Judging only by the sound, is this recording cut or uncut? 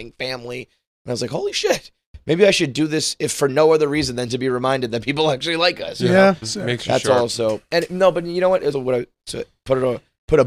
cut